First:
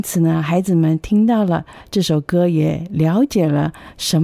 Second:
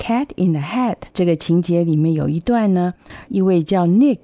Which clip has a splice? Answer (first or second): second